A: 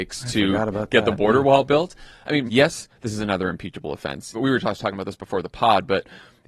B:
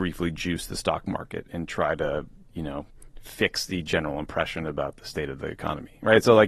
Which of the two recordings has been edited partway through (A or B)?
A